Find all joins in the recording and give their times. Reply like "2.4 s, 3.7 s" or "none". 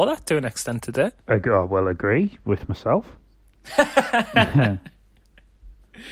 1.2 s